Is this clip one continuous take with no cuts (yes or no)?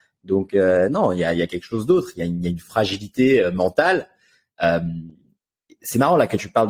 yes